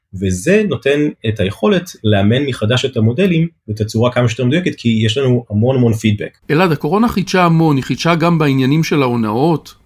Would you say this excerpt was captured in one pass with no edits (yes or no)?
no